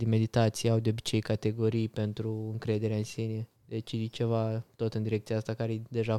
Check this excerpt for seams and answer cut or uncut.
cut